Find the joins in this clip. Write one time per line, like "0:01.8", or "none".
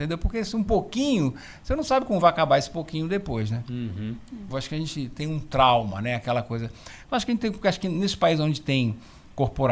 0:04.5
0:07.0